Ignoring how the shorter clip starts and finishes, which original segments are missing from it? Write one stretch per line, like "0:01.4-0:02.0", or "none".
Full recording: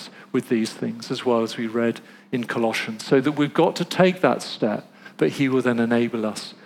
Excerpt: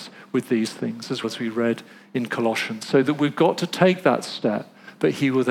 0:01.2-0:01.4